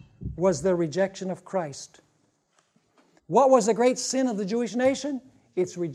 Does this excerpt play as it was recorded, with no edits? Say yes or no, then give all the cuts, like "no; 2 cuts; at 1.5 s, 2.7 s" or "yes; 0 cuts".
no; 1 cut; at 3.2 s